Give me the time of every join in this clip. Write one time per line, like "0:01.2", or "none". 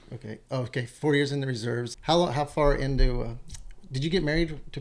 0:01.9